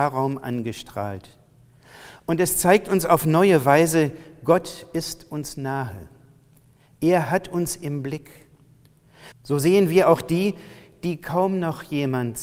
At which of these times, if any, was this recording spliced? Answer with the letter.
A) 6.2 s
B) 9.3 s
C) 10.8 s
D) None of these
B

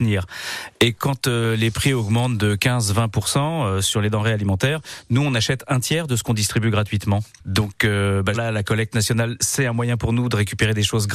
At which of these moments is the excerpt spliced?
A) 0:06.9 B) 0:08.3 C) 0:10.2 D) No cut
B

